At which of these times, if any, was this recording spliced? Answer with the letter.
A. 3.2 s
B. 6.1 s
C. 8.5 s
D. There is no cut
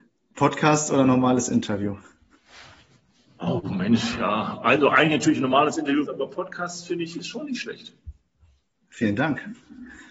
B